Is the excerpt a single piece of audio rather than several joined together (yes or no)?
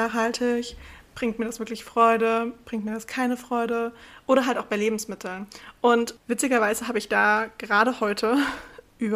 yes